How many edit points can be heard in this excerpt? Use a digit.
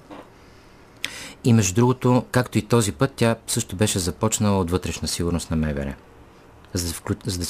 1